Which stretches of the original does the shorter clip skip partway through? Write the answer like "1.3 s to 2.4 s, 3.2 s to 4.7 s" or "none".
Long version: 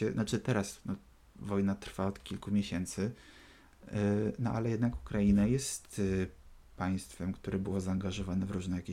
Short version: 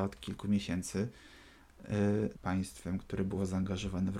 4.4 s to 6.7 s